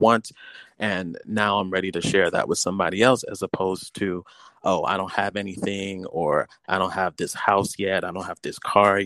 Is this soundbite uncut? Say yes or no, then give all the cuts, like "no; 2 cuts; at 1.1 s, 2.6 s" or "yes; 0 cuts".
yes; 0 cuts